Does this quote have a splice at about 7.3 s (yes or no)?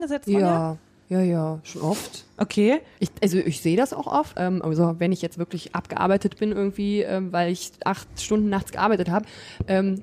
no